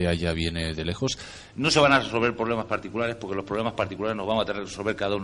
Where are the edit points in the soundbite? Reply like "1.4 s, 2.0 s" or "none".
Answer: 1.5 s